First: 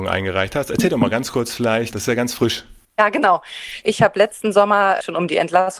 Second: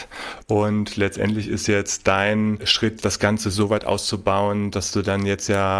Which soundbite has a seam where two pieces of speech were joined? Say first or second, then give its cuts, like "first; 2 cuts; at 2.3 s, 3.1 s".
first; 1 cut; at 3.8 s